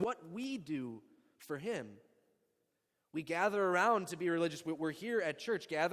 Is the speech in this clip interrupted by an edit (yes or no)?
no